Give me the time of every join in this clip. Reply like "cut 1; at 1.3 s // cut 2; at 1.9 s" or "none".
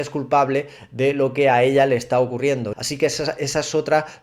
cut 1; at 2.7 s

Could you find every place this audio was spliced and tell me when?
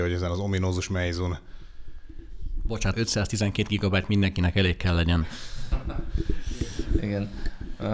cut 1; at 2.9 s

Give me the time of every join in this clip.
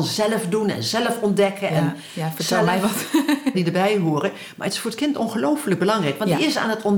cut 1; at 3.5 s

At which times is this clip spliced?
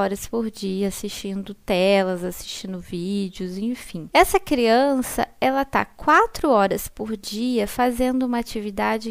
none

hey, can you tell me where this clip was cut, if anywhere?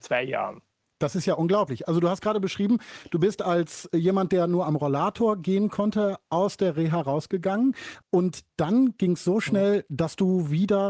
none

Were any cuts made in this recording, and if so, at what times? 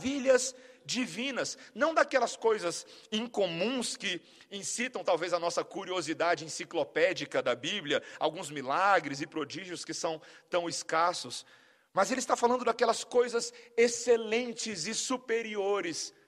none

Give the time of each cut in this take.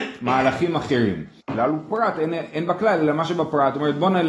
cut 1; at 1.4 s

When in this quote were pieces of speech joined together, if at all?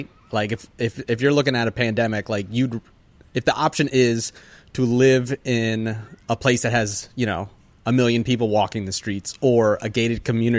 none

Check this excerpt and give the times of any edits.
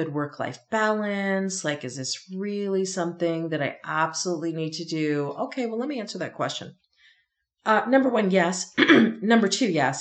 none

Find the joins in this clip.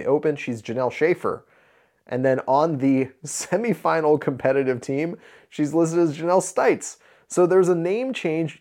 none

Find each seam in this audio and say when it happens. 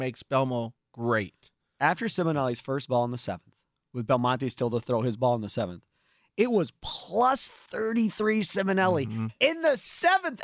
none

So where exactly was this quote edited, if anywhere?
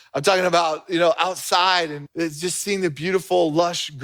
cut 1; at 2.1 s

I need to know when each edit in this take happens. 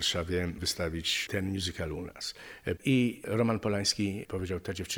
cut 1; at 2.8 s

